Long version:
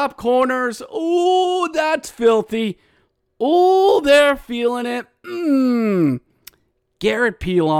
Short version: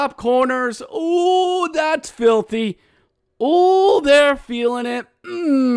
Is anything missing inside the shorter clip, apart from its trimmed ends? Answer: no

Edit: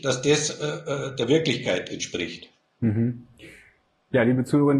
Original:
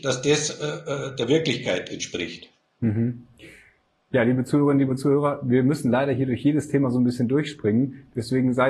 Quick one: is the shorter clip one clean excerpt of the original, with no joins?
yes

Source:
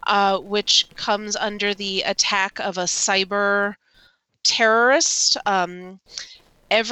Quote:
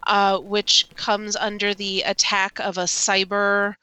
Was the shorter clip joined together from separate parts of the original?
no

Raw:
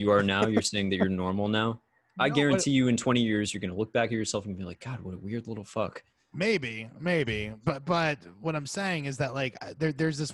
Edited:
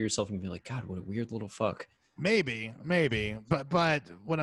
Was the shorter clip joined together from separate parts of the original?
no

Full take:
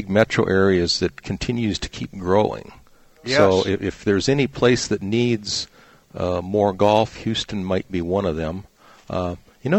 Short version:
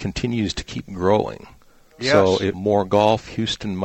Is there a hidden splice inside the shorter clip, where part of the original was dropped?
yes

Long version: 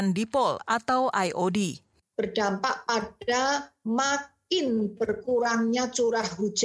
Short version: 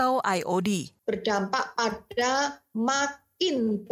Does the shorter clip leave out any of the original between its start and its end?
yes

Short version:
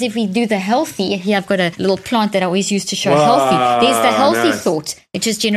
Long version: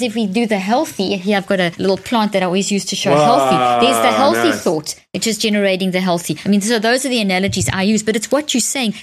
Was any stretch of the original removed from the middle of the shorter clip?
no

